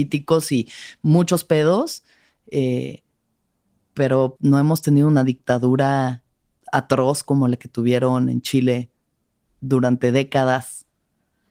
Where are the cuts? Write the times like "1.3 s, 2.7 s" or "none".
4.4 s